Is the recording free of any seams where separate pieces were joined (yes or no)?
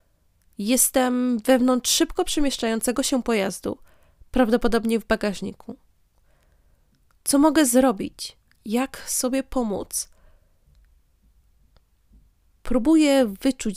yes